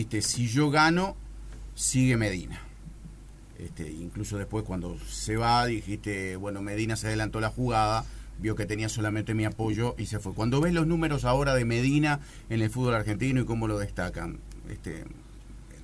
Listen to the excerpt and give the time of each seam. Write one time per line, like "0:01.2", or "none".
none